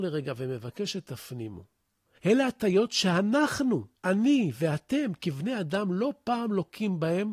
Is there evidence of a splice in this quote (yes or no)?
yes